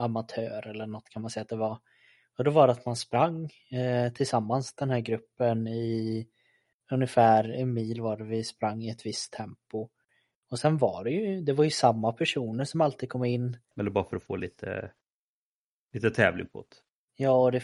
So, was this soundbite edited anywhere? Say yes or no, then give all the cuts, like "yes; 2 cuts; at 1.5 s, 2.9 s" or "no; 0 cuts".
yes; 1 cut; at 13.7 s